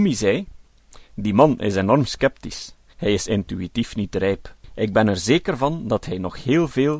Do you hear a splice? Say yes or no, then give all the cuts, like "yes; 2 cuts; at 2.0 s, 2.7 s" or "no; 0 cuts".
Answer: yes; 1 cut; at 2.9 s